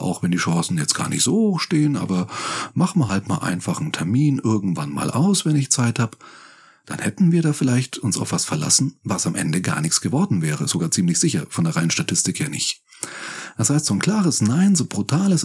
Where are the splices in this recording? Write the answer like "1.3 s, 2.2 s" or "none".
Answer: none